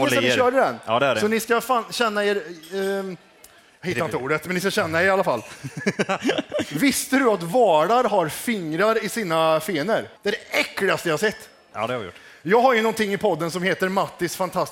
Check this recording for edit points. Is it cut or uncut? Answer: cut